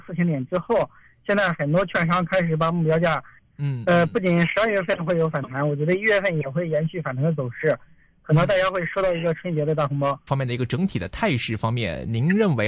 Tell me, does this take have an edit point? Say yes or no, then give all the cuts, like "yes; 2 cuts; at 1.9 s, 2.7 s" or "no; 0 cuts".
yes; 2 cuts; at 3.4 s, 10.3 s